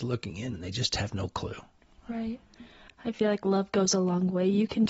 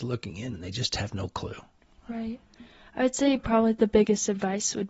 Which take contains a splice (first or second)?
first